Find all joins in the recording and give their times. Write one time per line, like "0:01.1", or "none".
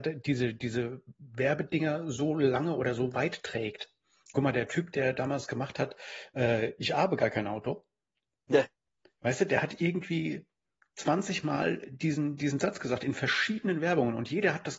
none